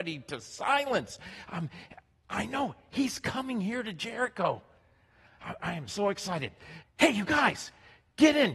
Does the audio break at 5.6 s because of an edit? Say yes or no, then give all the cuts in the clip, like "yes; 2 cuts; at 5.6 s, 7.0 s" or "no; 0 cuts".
yes; 2 cuts; at 5.6 s, 6.8 s